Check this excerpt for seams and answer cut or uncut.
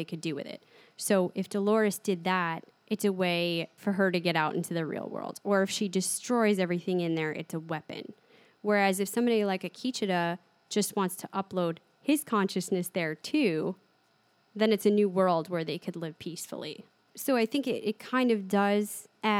uncut